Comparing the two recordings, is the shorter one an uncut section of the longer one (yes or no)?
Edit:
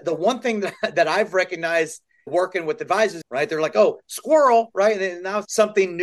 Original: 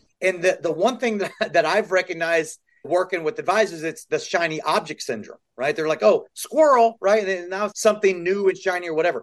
no